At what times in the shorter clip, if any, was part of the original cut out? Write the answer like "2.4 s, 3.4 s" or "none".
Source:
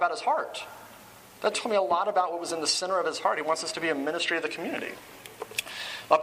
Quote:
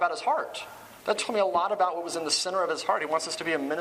1.0 s

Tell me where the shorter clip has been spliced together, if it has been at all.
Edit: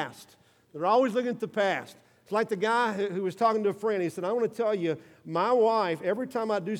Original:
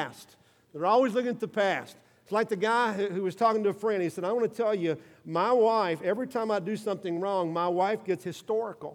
none

